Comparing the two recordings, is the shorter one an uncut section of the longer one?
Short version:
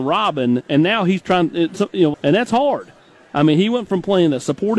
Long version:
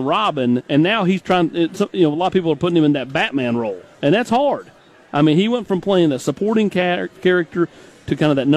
no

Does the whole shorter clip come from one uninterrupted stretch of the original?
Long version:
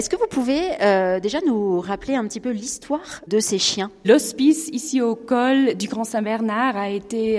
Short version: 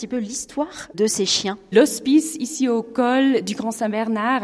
yes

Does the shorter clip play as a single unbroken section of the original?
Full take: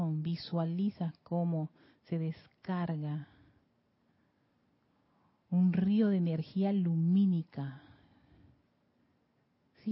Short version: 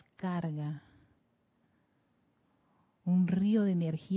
yes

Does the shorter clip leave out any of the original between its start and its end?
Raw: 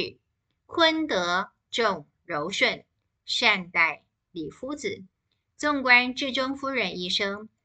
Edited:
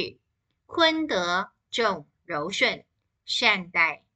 no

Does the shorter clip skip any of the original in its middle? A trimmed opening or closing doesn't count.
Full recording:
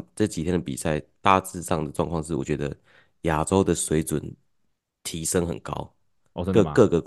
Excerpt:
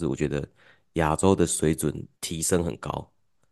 yes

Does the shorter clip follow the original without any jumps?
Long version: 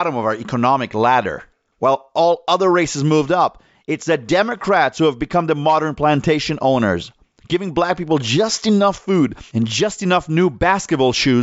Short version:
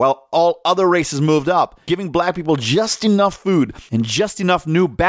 no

